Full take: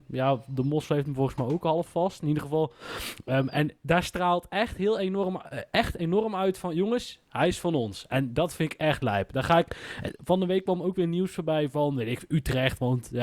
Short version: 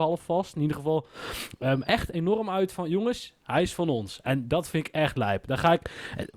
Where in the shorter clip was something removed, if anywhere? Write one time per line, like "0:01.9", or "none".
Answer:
0:01.8